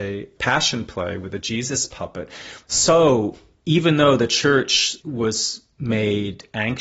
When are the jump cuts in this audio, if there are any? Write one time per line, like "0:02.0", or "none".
0:02.7